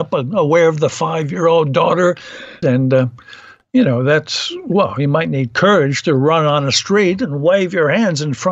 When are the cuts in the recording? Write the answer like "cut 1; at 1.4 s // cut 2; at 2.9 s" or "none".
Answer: cut 1; at 2.6 s